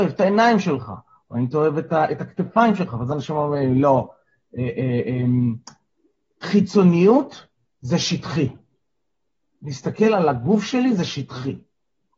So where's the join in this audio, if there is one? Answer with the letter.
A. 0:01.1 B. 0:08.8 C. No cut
C